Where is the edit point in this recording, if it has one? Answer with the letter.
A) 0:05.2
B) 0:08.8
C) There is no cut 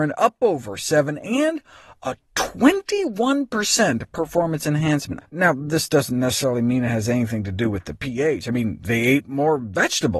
A